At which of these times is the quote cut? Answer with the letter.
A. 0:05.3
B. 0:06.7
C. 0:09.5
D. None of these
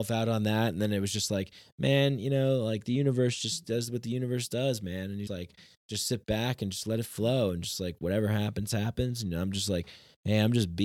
A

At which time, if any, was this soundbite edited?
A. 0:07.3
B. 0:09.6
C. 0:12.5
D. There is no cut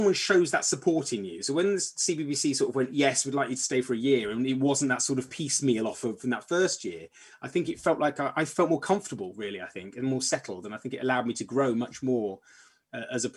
D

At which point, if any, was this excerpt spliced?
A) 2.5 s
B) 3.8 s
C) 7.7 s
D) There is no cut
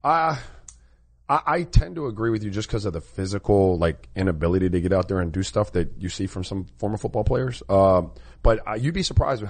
D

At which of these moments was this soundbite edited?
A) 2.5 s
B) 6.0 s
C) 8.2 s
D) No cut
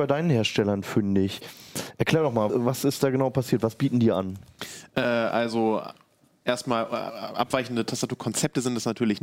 A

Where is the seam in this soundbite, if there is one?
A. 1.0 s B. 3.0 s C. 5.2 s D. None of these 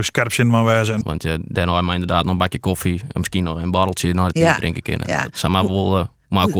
A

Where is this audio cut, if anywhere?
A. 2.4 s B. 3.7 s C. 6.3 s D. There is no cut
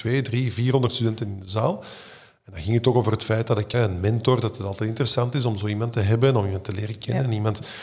B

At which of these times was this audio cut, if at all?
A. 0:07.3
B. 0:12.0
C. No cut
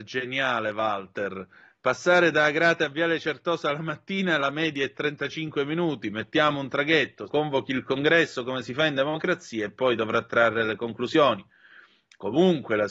A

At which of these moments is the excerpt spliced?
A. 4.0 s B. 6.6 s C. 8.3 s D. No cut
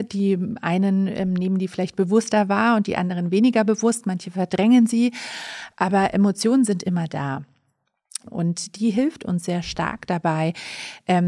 C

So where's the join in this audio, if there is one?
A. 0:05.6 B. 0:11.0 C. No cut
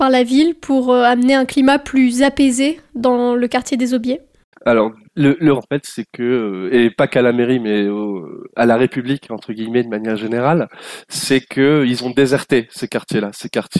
A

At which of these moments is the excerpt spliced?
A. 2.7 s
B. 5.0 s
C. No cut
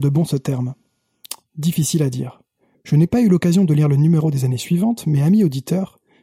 A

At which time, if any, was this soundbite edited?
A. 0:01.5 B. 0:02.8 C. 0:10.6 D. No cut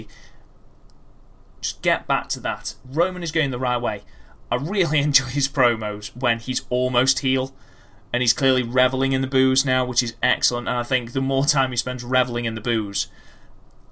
A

